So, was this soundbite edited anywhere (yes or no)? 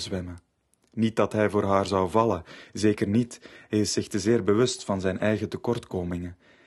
no